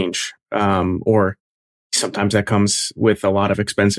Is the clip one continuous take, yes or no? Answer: yes